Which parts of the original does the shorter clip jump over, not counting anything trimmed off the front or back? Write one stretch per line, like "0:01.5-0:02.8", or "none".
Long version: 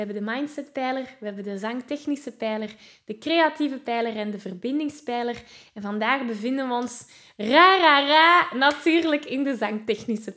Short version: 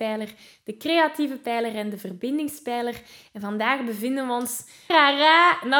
0:07.3-0:07.8